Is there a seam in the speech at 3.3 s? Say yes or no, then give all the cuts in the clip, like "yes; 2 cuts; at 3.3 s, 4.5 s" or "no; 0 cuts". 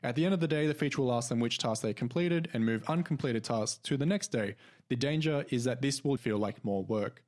no; 2 cuts; at 4.7 s, 6.2 s